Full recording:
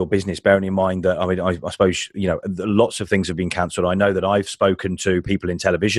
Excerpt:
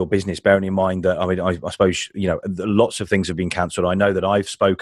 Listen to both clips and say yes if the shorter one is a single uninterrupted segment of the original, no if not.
yes